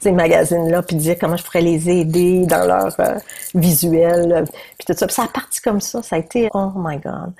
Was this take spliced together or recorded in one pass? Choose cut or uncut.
cut